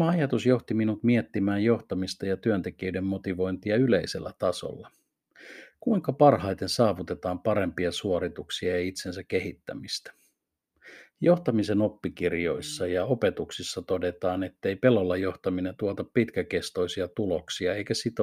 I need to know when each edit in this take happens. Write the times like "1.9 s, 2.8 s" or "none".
none